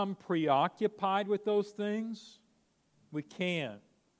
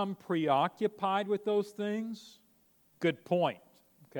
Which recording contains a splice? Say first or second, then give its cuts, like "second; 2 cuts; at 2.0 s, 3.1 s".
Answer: second; 1 cut; at 3.0 s